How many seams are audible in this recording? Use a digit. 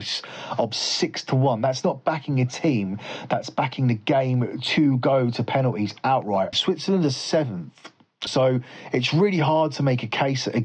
2